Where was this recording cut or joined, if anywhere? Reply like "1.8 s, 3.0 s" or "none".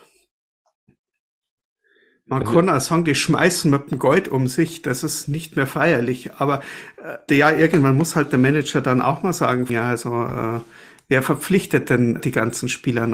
7.3 s, 9.7 s, 12.2 s